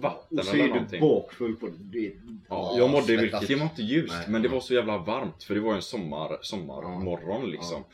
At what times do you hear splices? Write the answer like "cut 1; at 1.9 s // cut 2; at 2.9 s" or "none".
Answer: cut 1; at 3.5 s